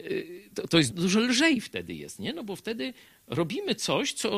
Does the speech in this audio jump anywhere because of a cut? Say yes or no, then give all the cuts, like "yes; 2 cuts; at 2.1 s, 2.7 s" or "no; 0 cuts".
yes; 1 cut; at 0.9 s